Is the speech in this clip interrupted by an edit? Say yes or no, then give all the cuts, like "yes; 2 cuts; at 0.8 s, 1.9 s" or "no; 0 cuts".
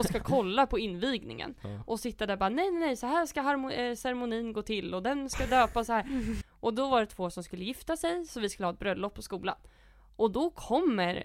yes; 1 cut; at 6.4 s